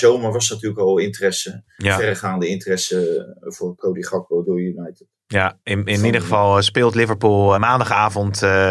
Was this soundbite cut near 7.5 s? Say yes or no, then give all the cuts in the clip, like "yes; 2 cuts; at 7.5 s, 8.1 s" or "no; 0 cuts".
yes; 1 cut; at 7.5 s